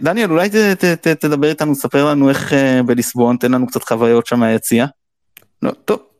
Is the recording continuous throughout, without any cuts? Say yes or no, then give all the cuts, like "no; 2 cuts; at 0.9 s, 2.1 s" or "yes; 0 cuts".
yes; 0 cuts